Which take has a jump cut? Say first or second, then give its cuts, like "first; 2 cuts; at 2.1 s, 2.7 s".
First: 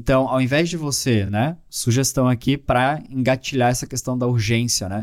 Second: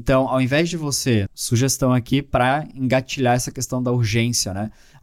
second; 1 cut; at 1.3 s